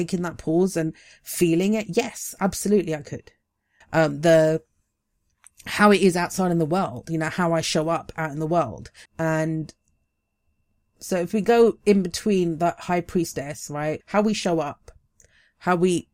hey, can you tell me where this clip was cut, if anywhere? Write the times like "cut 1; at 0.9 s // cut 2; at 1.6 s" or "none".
cut 1; at 3.8 s // cut 2; at 9.1 s // cut 3; at 14.0 s